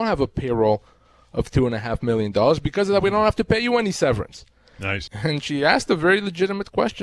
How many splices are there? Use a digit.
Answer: 1